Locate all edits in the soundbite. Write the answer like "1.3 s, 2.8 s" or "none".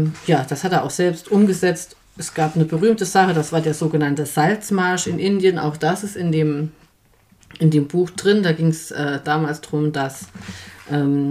none